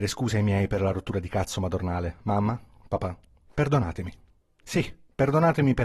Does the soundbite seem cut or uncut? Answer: uncut